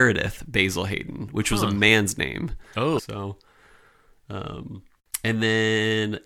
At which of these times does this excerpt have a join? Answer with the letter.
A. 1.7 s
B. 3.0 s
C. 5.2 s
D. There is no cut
B